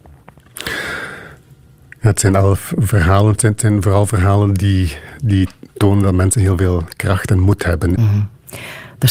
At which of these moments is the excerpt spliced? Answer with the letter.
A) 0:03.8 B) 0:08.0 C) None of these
B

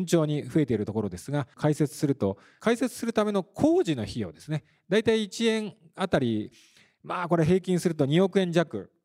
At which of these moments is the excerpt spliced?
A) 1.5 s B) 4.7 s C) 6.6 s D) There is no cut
A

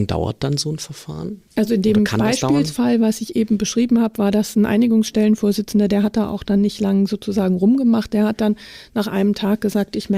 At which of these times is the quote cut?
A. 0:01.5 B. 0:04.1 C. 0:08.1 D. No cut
A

